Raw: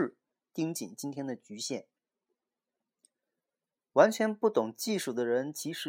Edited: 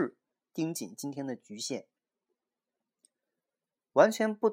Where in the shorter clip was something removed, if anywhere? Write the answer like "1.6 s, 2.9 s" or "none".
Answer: none